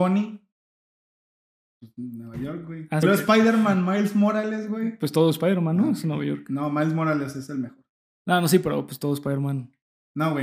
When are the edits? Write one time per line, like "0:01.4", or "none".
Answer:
0:03.0

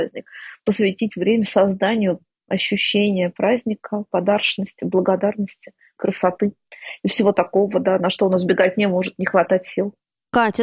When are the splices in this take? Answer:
none

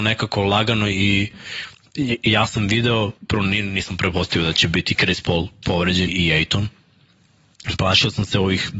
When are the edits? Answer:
0:03.2
0:06.1

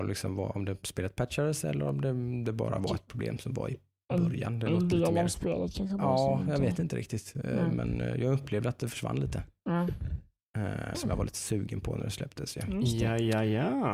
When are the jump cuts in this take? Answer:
0:10.9

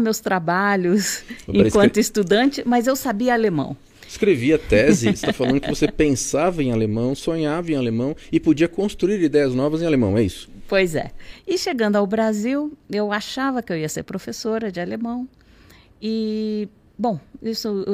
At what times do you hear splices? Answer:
none

